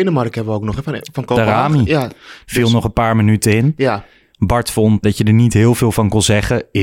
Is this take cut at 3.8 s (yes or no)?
no